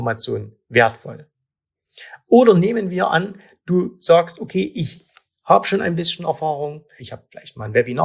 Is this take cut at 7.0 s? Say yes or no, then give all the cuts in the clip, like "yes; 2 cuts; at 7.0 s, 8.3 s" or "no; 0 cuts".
yes; 1 cut; at 7.0 s